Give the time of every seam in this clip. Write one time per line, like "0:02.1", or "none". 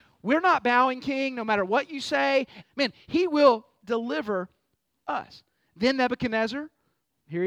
0:02.6